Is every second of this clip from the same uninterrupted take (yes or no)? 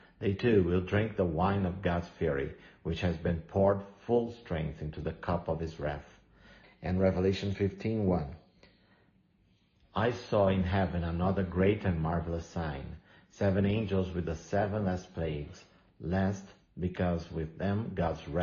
no